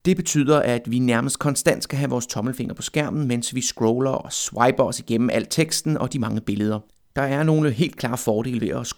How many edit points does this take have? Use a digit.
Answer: 1